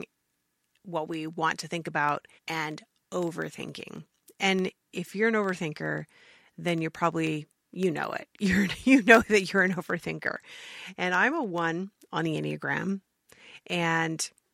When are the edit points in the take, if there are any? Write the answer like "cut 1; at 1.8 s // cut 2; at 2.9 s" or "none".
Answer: cut 1; at 2.4 s